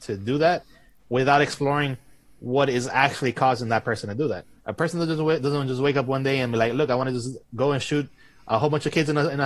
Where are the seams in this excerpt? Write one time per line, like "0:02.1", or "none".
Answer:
0:04.6